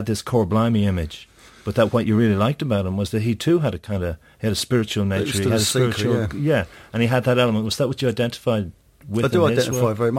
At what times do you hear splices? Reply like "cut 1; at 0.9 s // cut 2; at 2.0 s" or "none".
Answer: none